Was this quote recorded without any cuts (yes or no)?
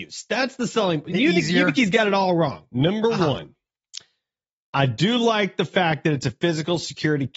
no